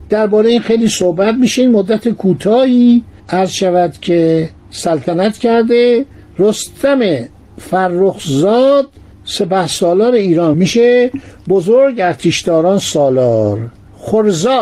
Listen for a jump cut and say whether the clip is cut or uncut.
cut